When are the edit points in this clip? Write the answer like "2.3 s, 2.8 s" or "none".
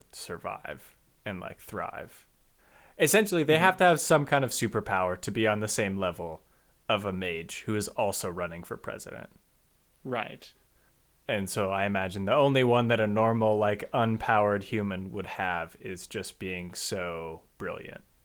none